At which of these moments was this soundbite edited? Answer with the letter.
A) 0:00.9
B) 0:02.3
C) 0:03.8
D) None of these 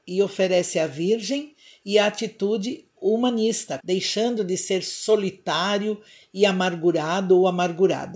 C